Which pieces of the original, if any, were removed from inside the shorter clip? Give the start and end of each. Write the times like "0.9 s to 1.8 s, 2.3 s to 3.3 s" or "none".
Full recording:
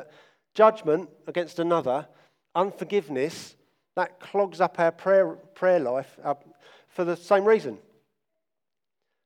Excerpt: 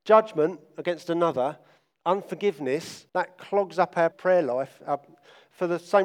3.6 s to 3.9 s, 4.9 s to 5.5 s